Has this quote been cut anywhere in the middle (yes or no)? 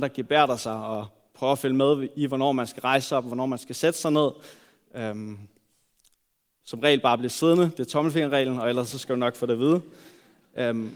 no